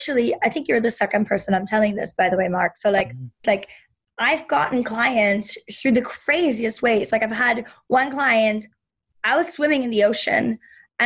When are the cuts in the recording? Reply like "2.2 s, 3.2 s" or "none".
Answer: 3.4 s